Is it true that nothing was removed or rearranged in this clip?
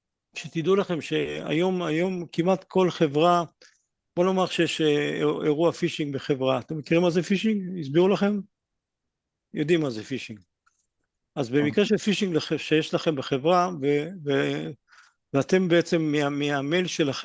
yes; 0 cuts

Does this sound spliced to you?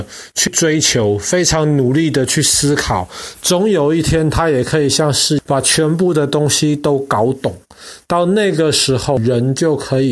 no; 0 cuts

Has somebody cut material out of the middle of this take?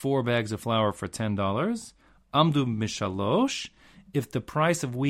no; 0 cuts

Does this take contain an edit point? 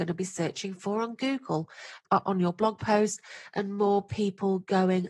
yes; 1 cut; at 2.0 s

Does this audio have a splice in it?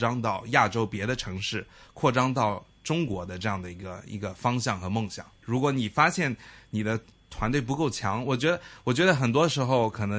yes; 1 cut; at 5.4 s

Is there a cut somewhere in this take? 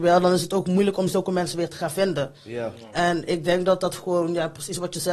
no; 0 cuts

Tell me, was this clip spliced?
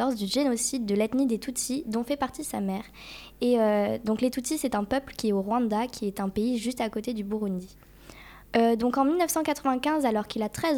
no; 0 cuts

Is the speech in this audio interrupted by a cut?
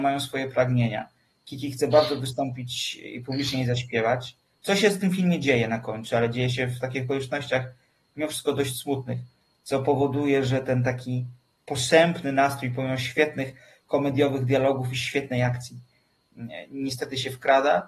no; 0 cuts

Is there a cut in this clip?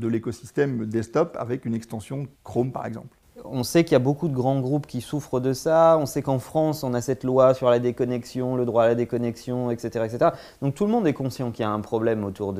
yes; 1 cut; at 2.3 s

